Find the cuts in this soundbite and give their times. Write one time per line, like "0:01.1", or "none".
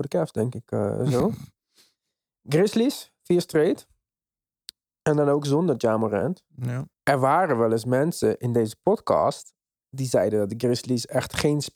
0:06.9